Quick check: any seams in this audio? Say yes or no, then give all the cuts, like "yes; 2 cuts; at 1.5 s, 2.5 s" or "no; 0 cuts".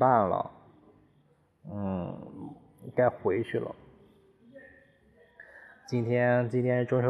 no; 0 cuts